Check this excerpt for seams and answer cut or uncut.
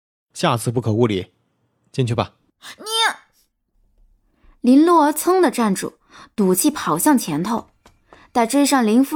uncut